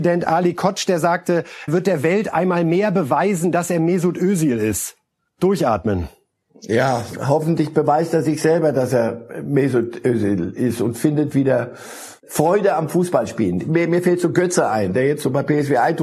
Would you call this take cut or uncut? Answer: cut